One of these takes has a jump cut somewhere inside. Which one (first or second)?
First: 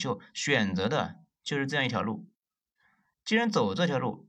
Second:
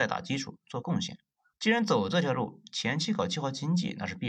second